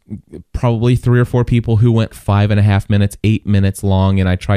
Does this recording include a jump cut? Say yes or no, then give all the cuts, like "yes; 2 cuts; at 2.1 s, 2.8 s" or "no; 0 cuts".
yes; 1 cut; at 2.1 s